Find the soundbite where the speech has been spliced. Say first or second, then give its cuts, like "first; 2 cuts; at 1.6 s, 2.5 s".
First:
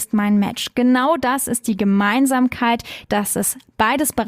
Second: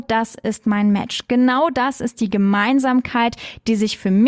first; 1 cut; at 3.0 s